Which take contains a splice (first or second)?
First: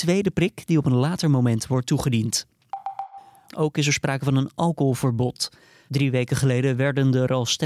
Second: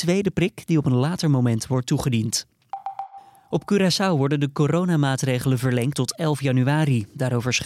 first